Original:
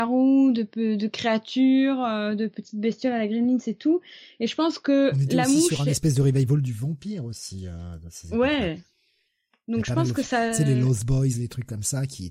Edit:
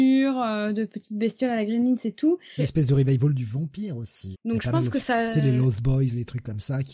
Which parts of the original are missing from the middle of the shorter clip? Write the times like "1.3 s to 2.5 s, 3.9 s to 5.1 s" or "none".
4.2 s to 5.9 s, 7.6 s to 9.6 s